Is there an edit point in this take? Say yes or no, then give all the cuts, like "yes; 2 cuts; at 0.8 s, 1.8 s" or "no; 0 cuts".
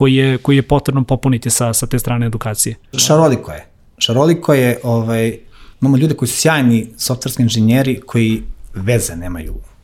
yes; 2 cuts; at 2.9 s, 5.7 s